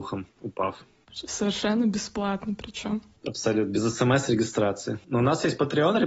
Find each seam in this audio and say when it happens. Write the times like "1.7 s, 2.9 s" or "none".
none

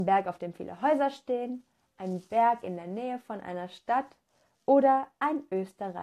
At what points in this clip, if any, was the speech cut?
none

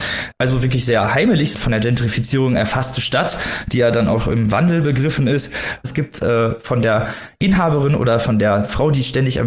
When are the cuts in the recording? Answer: 1.5 s, 5.8 s

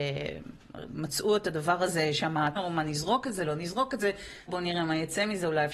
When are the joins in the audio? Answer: 2.6 s, 4.5 s

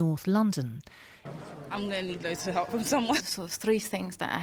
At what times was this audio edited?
1.3 s, 3.2 s

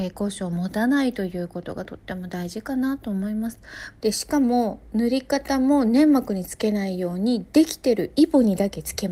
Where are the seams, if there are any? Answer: 4.0 s

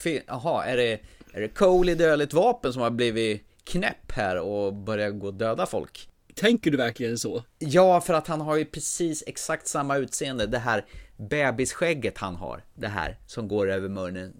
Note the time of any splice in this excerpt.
none

